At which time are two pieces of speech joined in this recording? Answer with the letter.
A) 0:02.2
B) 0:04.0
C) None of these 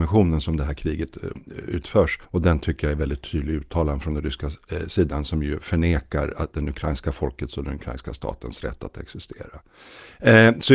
A